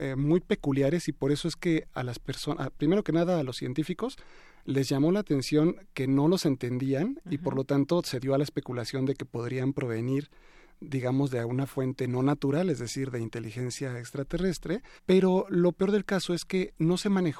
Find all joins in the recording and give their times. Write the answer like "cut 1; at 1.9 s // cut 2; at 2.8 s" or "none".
cut 1; at 15.0 s